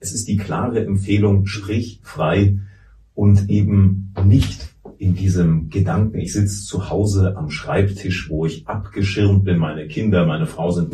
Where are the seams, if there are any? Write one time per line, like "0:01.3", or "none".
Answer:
none